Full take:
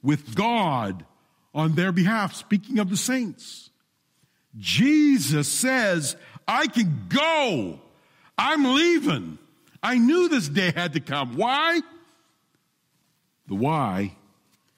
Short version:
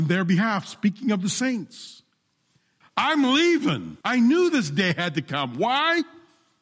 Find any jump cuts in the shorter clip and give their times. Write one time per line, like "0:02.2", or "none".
0:02.8
0:04.0